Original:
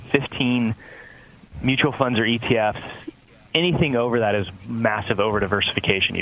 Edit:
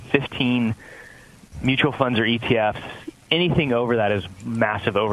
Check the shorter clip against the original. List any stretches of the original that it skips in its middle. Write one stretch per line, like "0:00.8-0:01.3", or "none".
0:03.2-0:03.4